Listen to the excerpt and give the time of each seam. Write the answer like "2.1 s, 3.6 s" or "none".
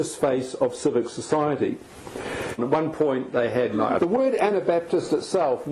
2.6 s, 4.0 s